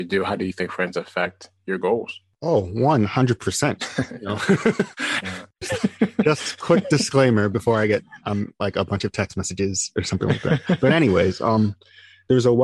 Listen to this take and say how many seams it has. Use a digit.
1